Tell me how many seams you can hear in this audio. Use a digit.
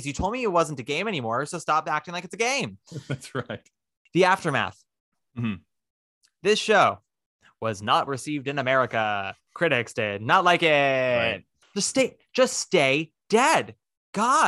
2